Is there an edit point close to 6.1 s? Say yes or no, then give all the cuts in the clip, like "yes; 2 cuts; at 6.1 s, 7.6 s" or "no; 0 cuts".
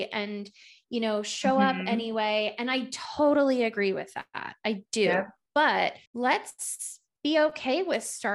yes; 1 cut; at 6.1 s